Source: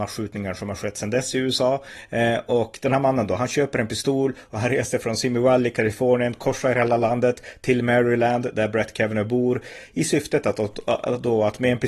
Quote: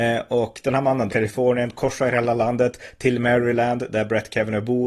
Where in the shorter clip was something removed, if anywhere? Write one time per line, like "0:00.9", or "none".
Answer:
0:01.1